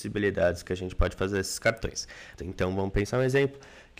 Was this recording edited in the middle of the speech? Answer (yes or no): yes